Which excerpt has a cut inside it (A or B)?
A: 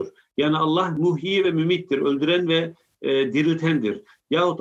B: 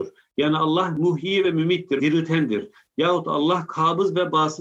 B